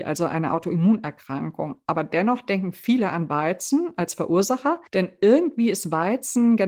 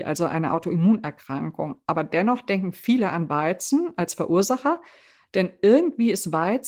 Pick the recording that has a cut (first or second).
first